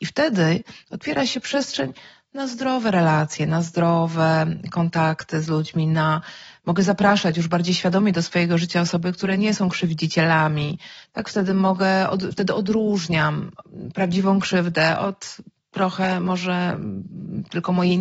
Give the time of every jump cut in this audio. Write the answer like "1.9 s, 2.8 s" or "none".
none